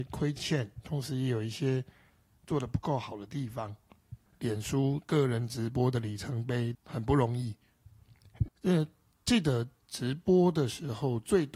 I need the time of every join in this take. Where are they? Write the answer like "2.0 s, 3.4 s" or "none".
4.3 s, 6.7 s, 8.5 s